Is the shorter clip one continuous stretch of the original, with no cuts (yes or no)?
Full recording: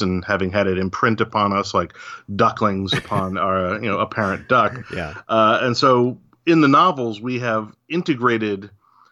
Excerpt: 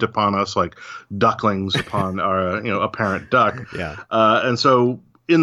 yes